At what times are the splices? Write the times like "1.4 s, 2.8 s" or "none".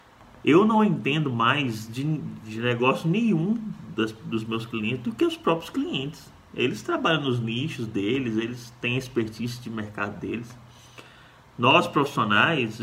none